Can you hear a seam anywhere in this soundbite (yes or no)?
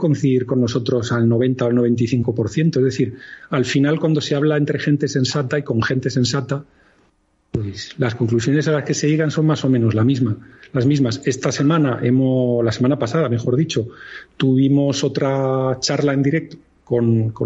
no